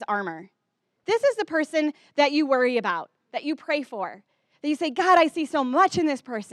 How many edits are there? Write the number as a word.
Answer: one